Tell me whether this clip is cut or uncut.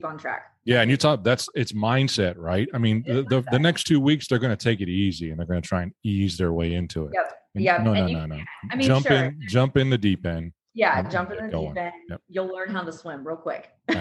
uncut